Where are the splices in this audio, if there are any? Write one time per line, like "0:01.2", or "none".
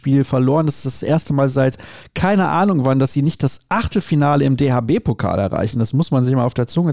none